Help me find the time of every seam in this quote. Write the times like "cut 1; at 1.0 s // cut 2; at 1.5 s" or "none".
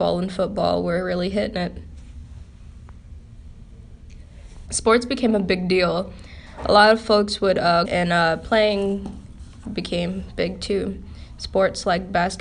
cut 1; at 4.7 s // cut 2; at 7.8 s